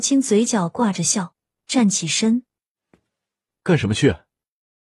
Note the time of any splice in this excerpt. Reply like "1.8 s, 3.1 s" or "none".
1.6 s